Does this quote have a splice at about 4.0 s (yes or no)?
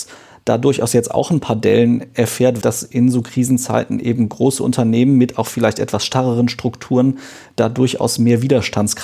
no